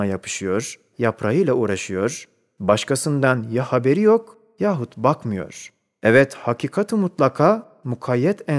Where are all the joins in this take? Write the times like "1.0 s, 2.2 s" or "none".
0.9 s